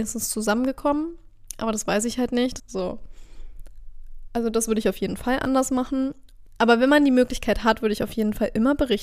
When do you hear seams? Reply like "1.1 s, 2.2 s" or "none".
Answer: 2.6 s, 6.5 s